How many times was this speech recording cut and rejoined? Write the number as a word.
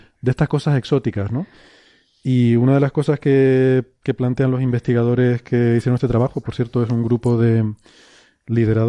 zero